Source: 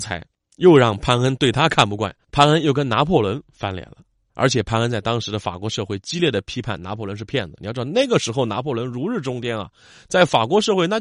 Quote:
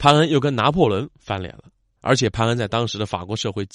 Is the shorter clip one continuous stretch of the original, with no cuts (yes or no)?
yes